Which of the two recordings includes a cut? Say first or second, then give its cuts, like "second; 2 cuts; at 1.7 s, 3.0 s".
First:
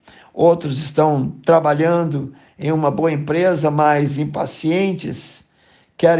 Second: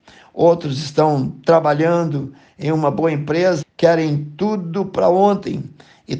second; 1 cut; at 3.6 s